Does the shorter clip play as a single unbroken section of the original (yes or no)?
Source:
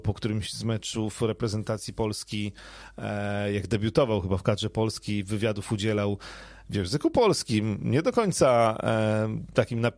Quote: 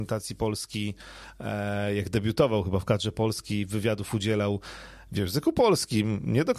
yes